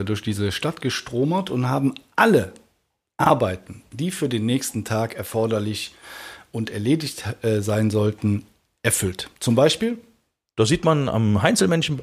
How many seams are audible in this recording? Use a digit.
0